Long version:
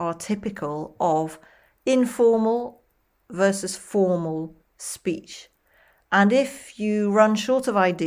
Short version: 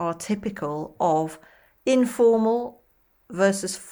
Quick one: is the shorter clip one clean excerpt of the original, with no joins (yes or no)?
yes